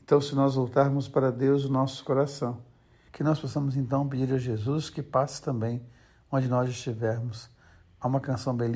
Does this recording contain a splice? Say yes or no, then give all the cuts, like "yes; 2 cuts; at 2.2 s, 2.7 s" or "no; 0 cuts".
yes; 1 cut; at 3.1 s